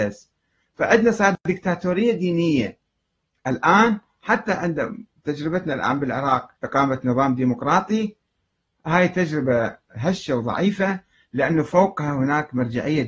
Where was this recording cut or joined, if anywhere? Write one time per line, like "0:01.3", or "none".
0:06.6